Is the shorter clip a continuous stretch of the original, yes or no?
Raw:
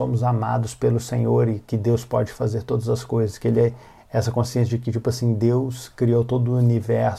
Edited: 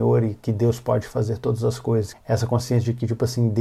no